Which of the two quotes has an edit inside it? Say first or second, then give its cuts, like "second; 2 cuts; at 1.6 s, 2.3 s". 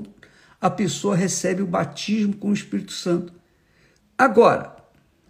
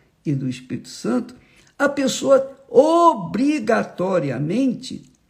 first; 1 cut; at 4.0 s